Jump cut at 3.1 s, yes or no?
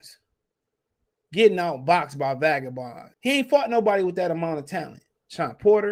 yes